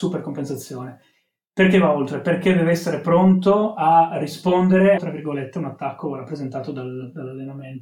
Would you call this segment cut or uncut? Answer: cut